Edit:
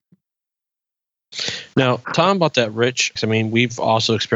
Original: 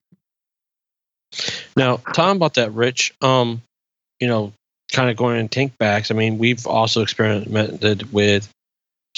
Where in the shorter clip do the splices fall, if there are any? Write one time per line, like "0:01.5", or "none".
0:03.2